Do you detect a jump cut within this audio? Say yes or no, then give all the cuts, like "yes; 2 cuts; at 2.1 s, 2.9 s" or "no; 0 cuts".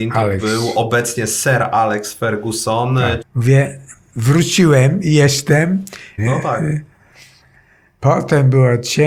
yes; 2 cuts; at 3.2 s, 6.2 s